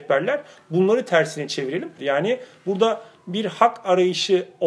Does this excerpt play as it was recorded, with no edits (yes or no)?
no